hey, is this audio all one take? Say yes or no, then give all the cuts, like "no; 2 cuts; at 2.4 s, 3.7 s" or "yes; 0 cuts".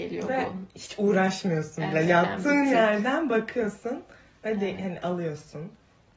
yes; 0 cuts